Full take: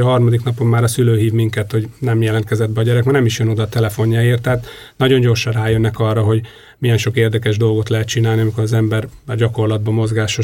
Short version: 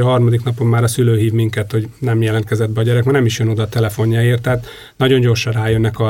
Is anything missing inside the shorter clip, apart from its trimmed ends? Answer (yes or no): no